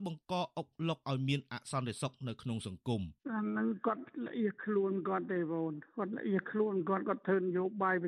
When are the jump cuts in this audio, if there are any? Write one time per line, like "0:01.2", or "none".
0:03.2